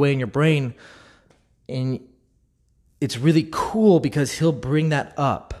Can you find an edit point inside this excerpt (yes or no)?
no